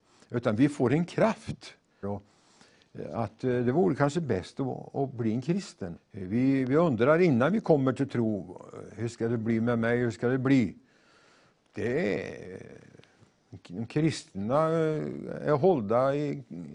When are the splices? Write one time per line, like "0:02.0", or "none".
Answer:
0:02.0
0:06.0
0:11.5